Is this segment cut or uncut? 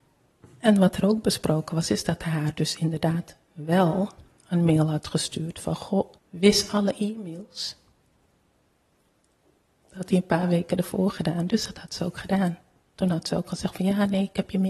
cut